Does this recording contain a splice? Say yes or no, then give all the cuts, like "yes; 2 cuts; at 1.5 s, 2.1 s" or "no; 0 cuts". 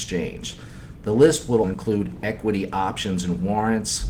yes; 1 cut; at 1.6 s